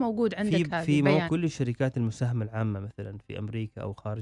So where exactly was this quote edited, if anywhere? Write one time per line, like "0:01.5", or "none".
0:01.3